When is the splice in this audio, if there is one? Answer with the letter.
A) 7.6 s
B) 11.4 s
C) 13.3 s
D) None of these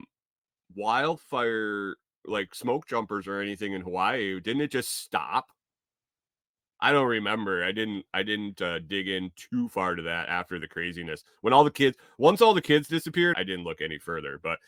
C